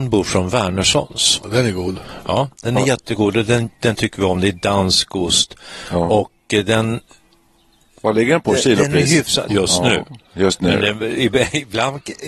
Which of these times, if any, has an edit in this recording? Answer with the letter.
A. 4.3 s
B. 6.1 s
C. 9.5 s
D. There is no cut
C